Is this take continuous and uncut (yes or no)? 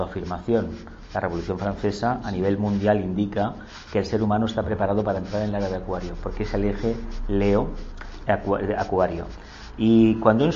yes